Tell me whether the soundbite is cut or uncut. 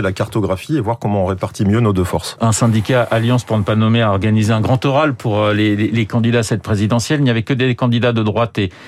uncut